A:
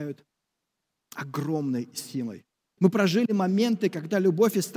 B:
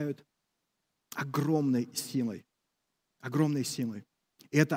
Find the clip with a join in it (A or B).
A